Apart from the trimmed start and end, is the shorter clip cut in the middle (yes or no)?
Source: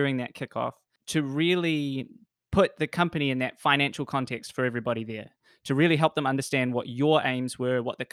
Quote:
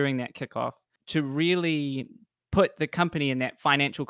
no